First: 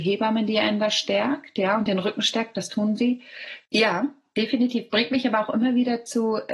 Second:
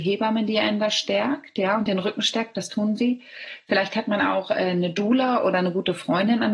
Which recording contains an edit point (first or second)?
first